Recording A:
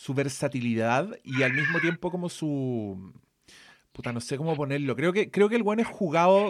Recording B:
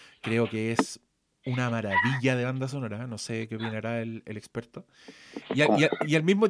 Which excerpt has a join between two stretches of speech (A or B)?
B